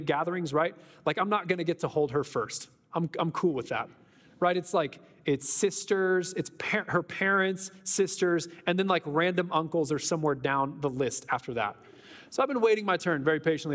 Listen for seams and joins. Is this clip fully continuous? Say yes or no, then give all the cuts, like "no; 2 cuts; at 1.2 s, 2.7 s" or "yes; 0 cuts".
yes; 0 cuts